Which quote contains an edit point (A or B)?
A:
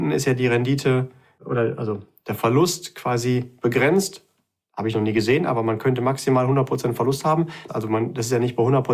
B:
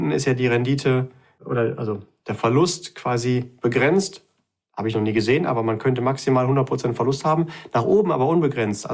A